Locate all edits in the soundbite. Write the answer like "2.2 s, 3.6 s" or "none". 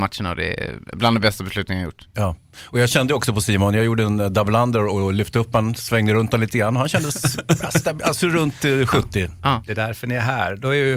2.1 s, 9.7 s